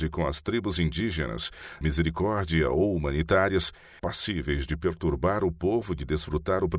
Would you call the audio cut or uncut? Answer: cut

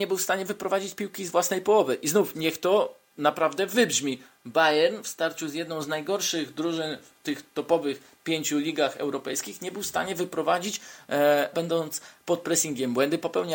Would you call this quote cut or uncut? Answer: cut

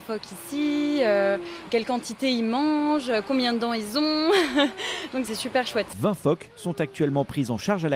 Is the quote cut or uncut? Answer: uncut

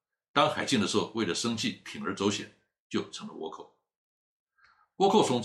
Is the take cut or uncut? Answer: uncut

